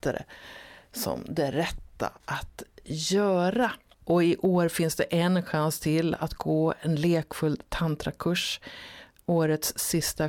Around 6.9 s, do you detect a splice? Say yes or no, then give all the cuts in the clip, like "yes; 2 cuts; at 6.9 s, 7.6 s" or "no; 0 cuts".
no; 1 cut; at 3.9 s